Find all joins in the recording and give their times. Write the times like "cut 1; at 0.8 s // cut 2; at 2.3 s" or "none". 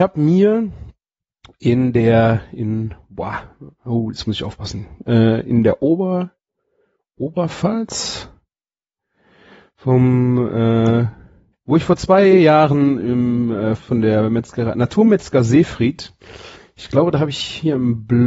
cut 1; at 11.5 s // cut 2; at 13.8 s